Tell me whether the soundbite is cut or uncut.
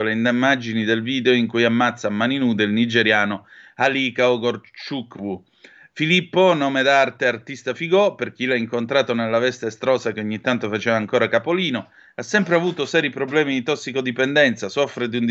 uncut